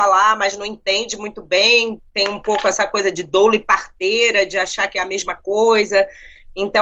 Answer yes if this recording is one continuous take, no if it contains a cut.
yes